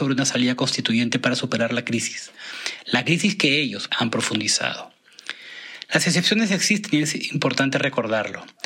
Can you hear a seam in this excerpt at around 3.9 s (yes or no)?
yes